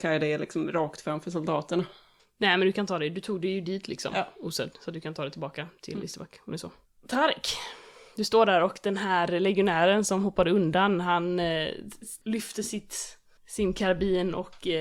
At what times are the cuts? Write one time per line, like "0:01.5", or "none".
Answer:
none